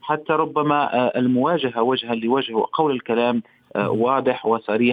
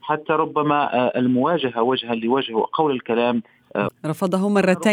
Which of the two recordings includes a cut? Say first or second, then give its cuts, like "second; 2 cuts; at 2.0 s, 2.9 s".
second; 1 cut; at 3.9 s